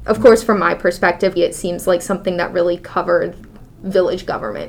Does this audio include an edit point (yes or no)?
yes